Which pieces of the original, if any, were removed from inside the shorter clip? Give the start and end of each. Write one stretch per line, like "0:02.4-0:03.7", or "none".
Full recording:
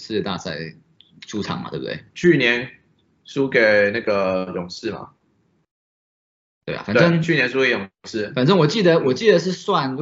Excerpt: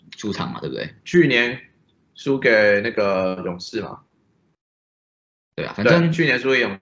none